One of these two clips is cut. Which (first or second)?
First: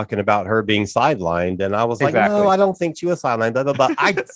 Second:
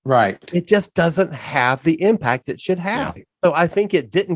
second